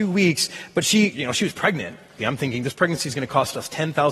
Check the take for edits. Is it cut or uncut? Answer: cut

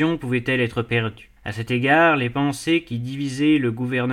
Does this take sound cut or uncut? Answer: cut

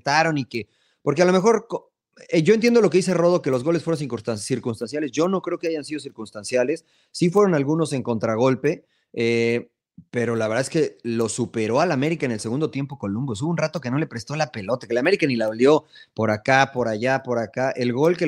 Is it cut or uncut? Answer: uncut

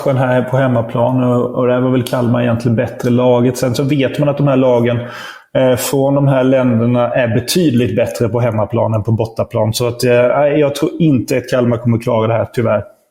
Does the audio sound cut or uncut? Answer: uncut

